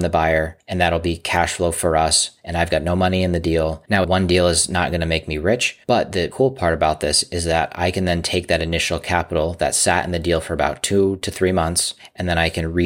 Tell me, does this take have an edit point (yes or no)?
yes